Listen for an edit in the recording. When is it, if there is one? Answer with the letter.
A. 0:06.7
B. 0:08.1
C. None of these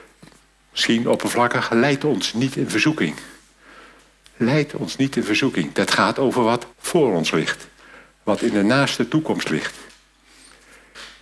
A